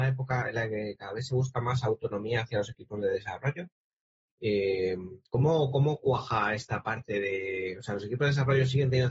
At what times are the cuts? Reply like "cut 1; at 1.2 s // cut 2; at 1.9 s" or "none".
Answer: cut 1; at 5.3 s